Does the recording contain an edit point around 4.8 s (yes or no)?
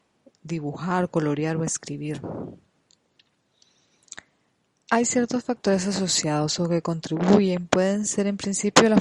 no